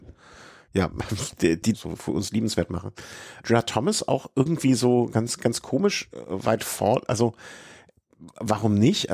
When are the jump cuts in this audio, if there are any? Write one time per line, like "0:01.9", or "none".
0:01.7
0:03.4